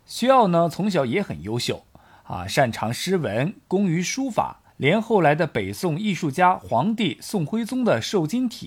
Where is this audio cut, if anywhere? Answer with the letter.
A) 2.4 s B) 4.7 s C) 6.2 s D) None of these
B